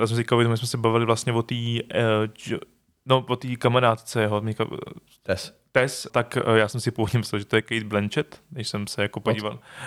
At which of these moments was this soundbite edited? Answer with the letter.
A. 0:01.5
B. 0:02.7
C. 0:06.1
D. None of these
C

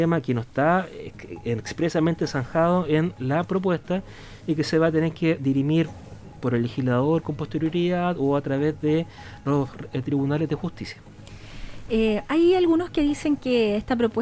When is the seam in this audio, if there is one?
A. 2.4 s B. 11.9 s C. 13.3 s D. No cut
D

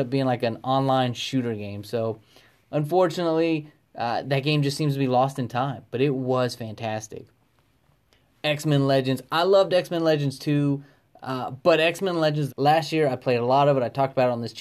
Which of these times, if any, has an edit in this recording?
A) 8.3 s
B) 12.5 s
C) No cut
B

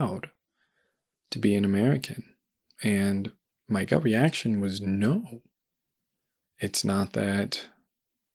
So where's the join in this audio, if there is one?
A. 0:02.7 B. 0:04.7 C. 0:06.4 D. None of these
C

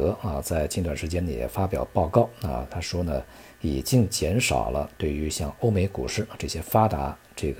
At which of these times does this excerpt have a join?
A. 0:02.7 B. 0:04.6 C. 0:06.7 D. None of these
D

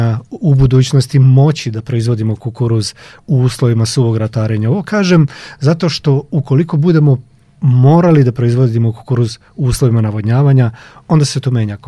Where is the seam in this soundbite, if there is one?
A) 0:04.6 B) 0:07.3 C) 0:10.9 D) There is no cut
D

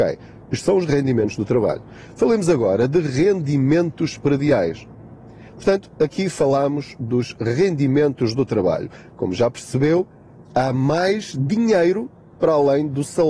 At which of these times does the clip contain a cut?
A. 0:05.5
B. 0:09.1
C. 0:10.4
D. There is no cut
A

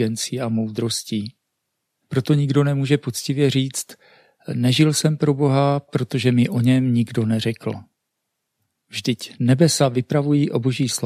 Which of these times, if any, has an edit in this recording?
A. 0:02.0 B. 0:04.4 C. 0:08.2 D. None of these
A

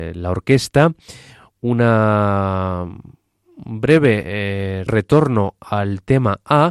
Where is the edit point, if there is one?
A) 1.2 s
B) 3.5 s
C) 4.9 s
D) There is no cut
C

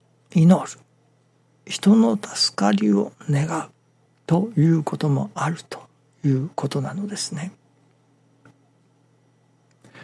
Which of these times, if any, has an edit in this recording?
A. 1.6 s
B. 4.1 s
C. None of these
B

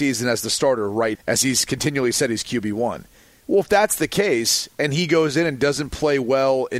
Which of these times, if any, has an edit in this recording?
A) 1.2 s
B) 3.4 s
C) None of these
A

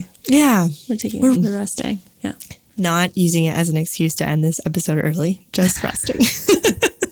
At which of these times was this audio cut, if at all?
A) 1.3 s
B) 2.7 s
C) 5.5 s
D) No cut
A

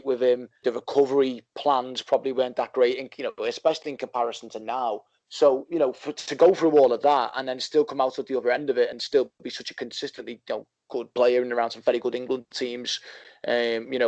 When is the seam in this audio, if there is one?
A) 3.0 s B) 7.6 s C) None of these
C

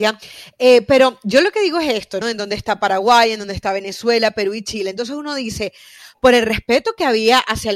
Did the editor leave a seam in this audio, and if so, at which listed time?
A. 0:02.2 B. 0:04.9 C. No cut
A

